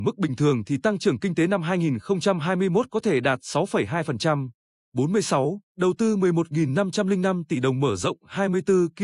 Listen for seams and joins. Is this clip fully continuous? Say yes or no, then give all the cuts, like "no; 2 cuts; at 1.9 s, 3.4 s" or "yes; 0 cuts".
yes; 0 cuts